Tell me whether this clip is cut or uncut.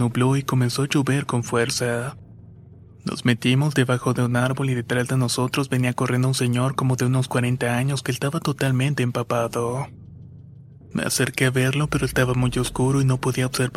cut